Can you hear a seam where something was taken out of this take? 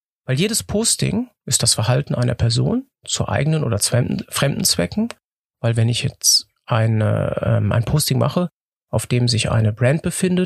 no; 0 cuts

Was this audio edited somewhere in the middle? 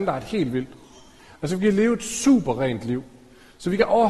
no; 0 cuts

